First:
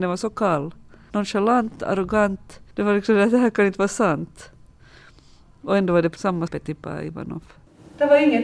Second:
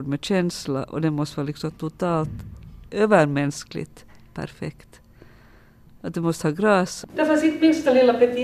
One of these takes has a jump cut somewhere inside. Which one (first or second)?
second